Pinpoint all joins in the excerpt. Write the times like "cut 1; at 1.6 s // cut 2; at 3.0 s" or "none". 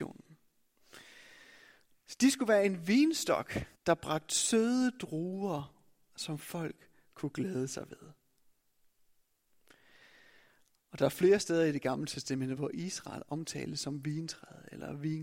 cut 1; at 3.7 s // cut 2; at 12.6 s